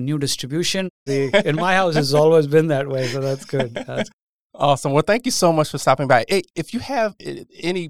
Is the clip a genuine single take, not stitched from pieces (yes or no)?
no